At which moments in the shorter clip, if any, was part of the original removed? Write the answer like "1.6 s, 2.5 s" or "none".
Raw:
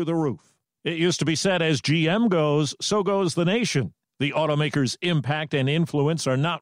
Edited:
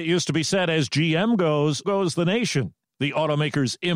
1.8 s

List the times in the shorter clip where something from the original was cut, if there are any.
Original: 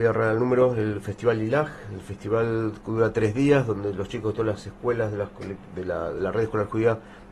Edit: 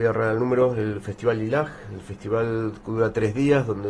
none

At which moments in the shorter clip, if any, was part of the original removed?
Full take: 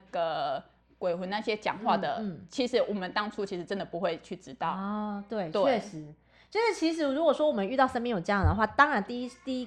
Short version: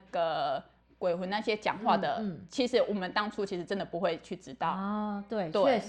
none

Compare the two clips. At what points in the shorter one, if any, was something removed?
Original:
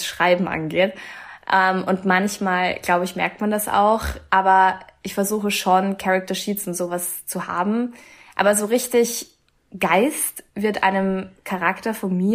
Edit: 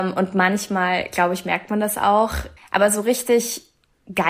2.6 s

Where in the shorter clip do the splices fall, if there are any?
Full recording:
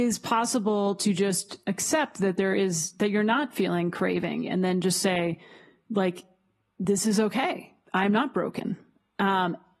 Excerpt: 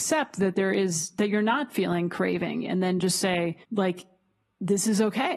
3.6 s

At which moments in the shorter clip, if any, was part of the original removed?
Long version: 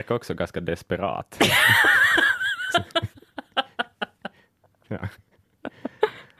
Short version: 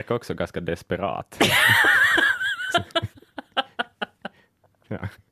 none

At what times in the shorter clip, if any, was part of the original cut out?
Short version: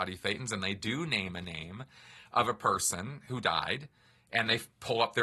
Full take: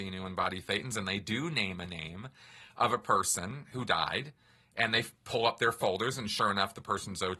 none

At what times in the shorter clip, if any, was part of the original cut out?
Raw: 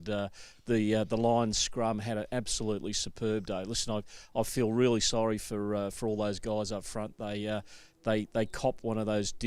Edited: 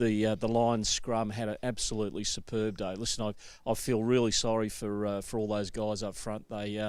none

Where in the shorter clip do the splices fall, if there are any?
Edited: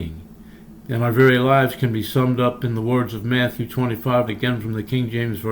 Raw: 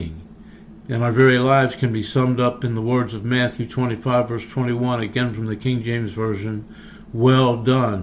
4.3 s

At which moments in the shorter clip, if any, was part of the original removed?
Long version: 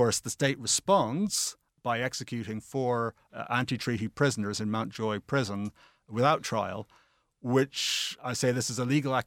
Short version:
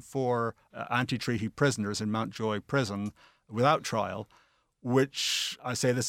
none

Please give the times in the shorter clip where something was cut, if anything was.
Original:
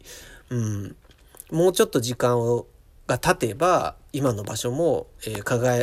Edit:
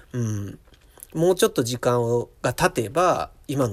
2.4 s

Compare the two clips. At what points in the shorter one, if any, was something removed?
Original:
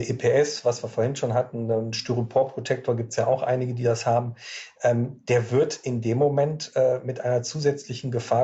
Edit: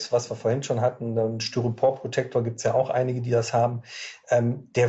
none

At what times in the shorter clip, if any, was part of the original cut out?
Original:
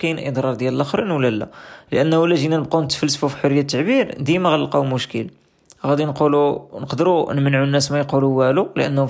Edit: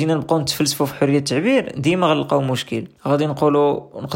3.0 s

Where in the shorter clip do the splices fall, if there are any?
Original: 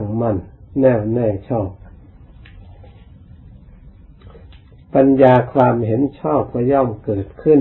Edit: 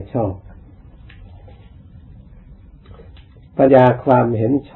3.7 s

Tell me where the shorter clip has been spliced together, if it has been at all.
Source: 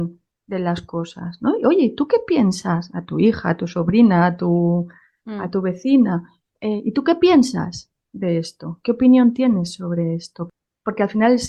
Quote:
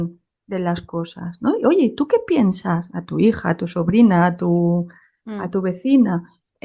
none

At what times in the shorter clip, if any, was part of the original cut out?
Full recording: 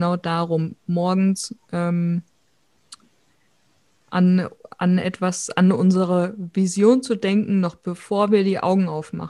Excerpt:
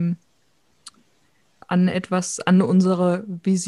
1.6 s

